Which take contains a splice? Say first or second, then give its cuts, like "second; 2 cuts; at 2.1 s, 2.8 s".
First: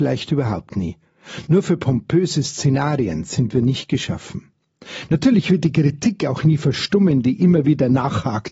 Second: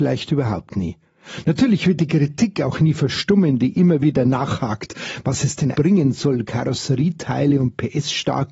second; 2 cuts; at 1.4 s, 5.7 s